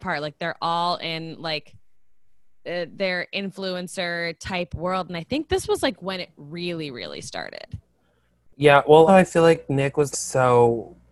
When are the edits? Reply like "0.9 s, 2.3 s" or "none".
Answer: 9.1 s, 10.1 s